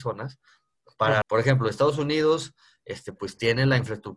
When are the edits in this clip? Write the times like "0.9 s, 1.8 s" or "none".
1.2 s